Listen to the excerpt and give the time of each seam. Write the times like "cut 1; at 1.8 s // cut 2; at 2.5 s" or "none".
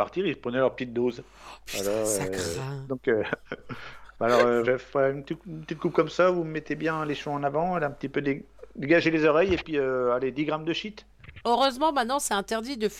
cut 1; at 4.6 s // cut 2; at 11.4 s

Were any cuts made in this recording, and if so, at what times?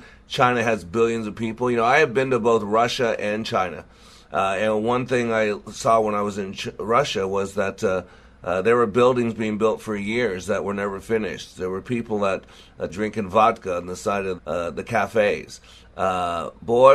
cut 1; at 12.9 s // cut 2; at 14.4 s

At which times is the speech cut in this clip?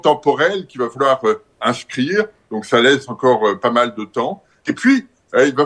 cut 1; at 2.5 s // cut 2; at 4.7 s

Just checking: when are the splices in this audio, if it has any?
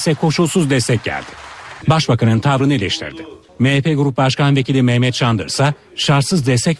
cut 1; at 1.8 s // cut 2; at 3.5 s

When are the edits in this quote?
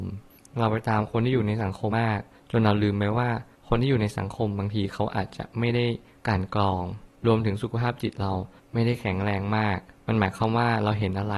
cut 1; at 1.9 s

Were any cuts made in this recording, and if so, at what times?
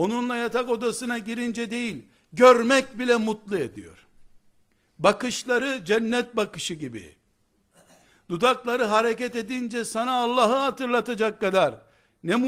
none

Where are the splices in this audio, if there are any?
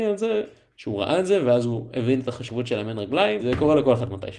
cut 1; at 3.4 s

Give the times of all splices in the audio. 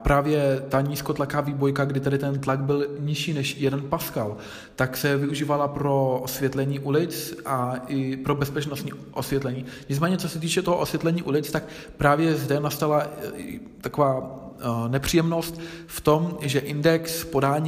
none

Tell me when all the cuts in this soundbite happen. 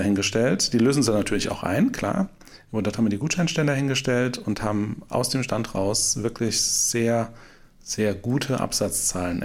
none

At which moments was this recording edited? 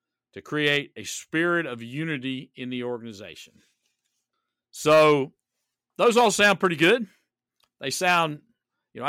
none

